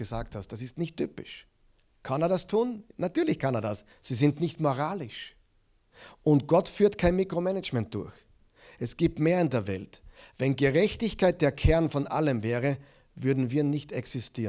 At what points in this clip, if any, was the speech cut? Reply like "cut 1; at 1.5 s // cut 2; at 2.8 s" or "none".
cut 1; at 3.9 s